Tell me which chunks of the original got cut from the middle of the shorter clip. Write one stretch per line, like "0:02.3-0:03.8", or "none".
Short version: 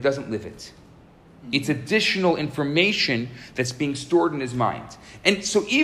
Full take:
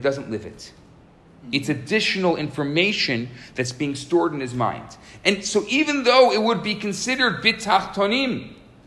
none

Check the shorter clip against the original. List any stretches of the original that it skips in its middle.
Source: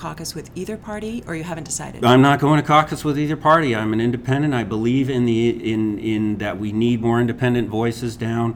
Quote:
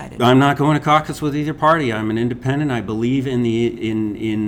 none

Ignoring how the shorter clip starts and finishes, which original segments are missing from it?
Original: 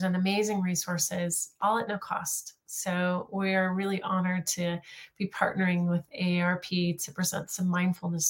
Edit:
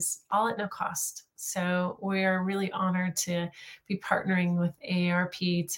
none

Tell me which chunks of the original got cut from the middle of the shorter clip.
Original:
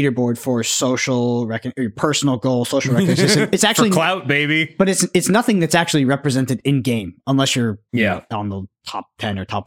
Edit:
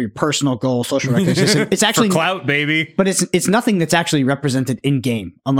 none

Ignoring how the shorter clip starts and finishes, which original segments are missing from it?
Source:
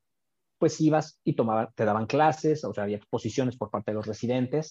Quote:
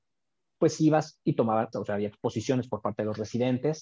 0:01.7-0:02.6

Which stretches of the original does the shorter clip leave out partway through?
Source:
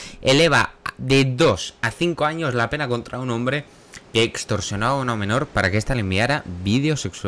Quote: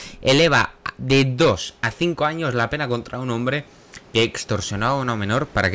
none

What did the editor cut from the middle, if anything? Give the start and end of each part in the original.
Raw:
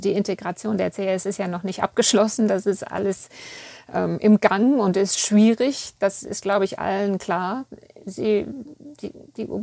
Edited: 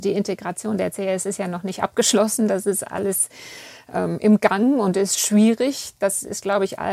none

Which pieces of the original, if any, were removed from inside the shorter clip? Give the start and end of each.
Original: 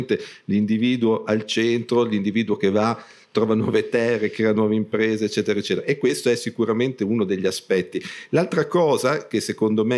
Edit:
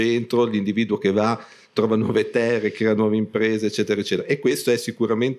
none

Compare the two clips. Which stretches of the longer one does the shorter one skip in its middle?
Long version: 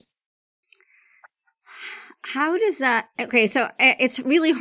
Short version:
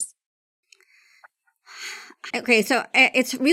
0:02.3-0:03.1

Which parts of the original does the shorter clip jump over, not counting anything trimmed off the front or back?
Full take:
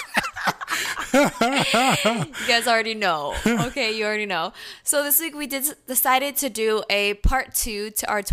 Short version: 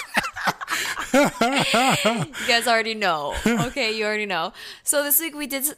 none

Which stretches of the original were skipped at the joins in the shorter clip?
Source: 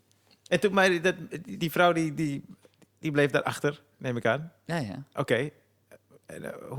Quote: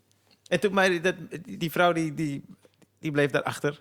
none

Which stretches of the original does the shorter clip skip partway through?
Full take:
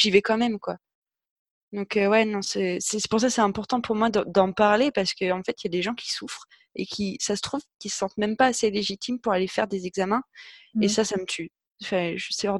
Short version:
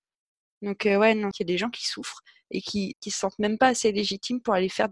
0:02.4-0:05.6
0:07.2-0:07.7

